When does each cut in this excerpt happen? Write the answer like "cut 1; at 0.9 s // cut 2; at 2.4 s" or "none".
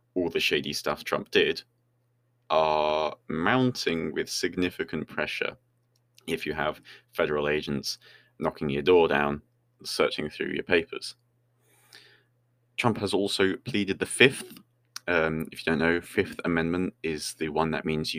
none